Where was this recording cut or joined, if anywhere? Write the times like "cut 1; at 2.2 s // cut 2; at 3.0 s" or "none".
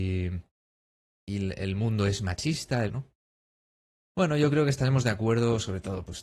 cut 1; at 2.9 s